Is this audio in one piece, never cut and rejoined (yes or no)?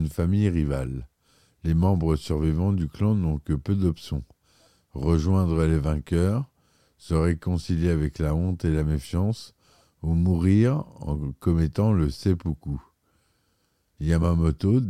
yes